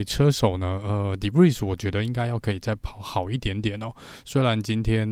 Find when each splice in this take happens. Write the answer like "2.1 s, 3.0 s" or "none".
none